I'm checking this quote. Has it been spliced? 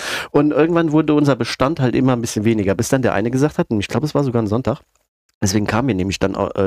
no; 0 cuts

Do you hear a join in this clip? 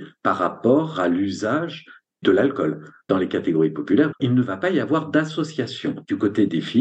no; 0 cuts

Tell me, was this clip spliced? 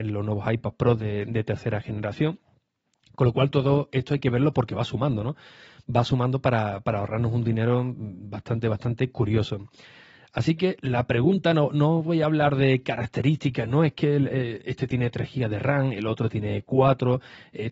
no; 0 cuts

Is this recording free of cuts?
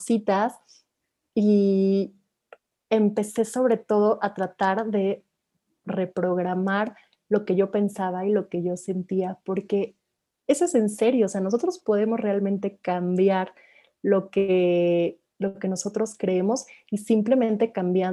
yes; 0 cuts

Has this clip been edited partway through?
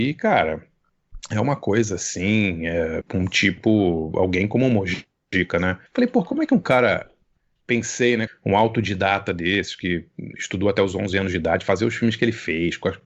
yes; 3 cuts; at 3.0 s, 5.9 s, 8.3 s

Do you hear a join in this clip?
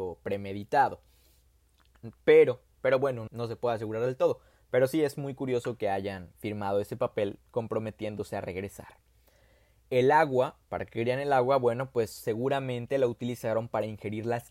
yes; 1 cut; at 3.3 s

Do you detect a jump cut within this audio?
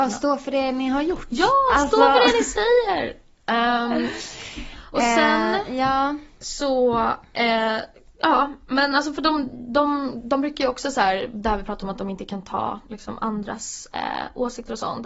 no; 0 cuts

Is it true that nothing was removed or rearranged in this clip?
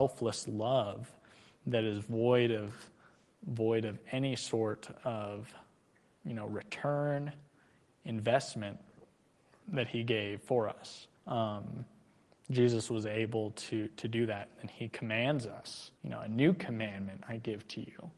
no; 2 cuts; at 11.2 s, 16.0 s

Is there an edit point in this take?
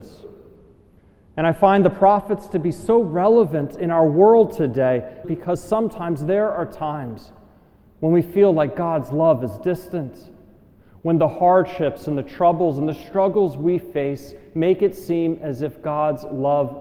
yes; 1 cut; at 5.2 s

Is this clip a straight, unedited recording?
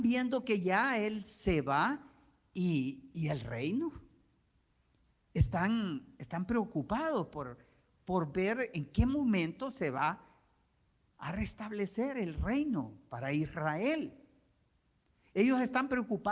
yes; 0 cuts

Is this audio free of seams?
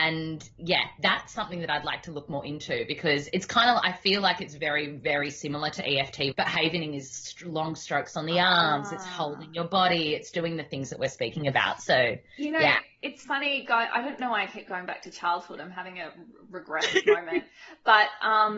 no; 1 cut; at 6.3 s

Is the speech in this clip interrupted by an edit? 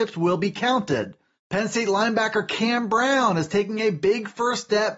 yes; 1 cut; at 1.4 s

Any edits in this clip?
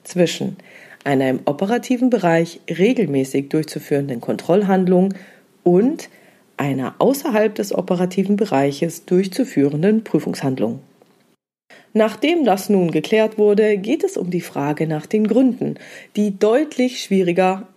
no; 0 cuts

